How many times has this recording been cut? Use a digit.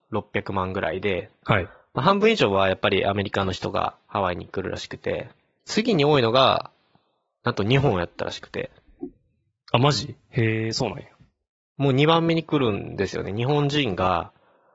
2